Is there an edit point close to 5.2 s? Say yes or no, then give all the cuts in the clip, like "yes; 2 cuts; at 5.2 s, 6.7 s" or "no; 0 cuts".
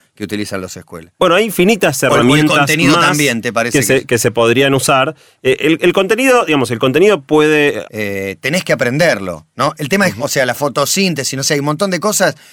no; 2 cuts; at 7.8 s, 10.2 s